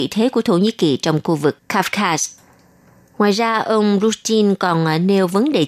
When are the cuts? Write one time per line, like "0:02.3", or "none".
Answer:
none